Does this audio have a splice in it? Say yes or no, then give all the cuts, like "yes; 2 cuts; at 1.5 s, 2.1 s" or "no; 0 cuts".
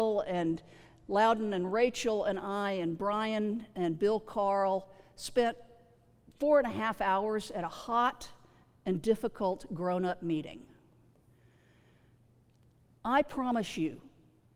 no; 0 cuts